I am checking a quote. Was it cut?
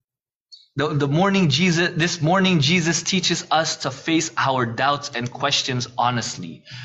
no; 0 cuts

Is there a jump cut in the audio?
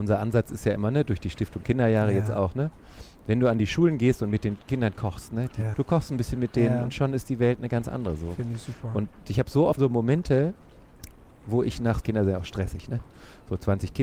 yes; 3 cuts; at 5.7 s, 9.8 s, 12.0 s

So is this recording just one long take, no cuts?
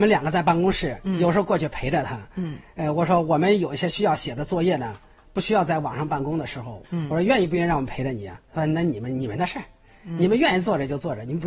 no; 1 cut; at 6.8 s

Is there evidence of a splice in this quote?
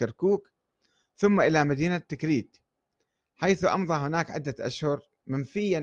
no; 0 cuts

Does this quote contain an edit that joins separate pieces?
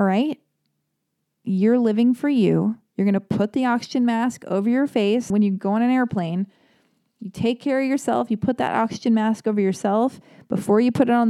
yes; 1 cut; at 5.3 s

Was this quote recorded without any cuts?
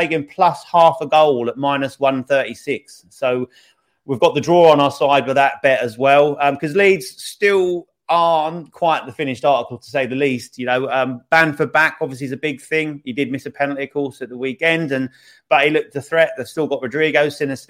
yes; 0 cuts

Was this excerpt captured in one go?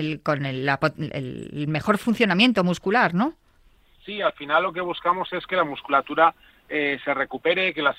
yes; 0 cuts

